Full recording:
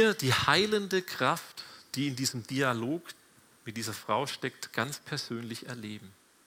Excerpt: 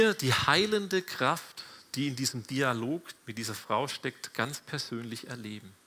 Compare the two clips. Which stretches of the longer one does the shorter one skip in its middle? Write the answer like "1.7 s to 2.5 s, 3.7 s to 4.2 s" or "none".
3.2 s to 3.6 s

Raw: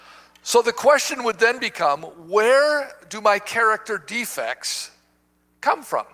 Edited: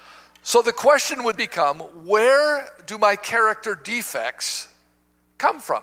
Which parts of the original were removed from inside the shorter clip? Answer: 1.4 s to 1.6 s

